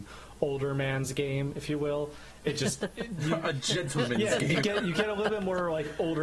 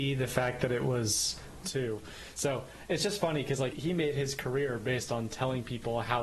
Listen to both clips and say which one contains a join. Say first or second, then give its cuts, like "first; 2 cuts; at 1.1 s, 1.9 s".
second; 2 cuts; at 1.6 s, 3.7 s